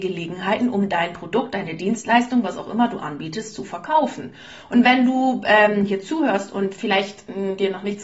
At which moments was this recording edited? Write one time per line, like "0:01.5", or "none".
none

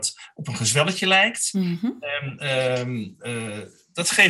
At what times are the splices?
none

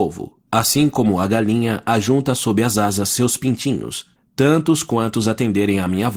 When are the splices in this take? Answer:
0:04.2

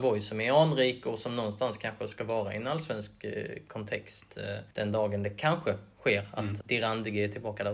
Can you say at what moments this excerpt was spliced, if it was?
0:04.7
0:06.6

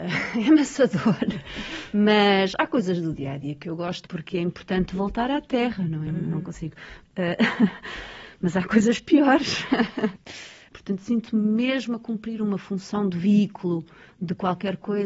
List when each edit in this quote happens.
0:04.1
0:06.1
0:10.7

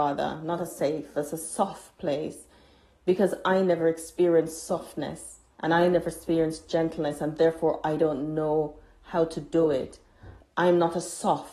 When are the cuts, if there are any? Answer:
0:05.5
0:10.4

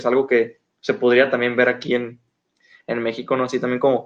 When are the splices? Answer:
none

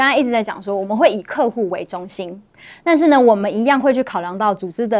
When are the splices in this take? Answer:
none

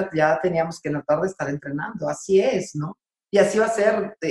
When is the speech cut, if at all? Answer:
none

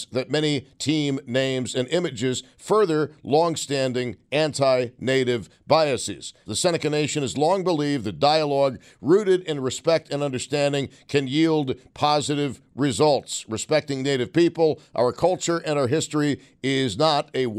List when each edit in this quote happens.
0:06.5

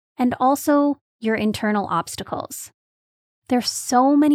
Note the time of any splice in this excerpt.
none

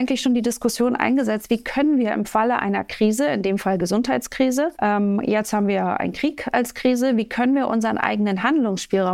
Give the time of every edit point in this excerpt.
0:04.8

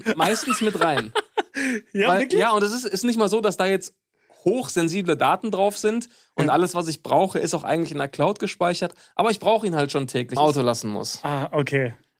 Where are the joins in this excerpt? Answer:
0:10.4

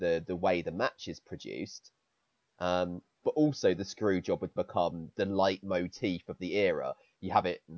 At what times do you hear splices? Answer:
0:03.2
0:04.6

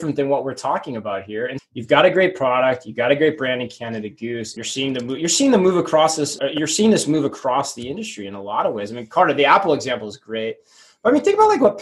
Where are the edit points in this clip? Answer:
0:01.6
0:04.6
0:06.4

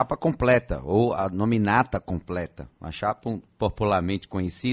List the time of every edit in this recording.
none

